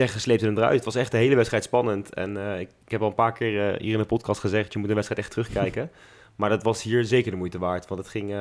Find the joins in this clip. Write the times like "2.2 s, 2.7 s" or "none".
none